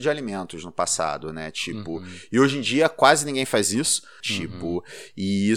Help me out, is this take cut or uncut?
cut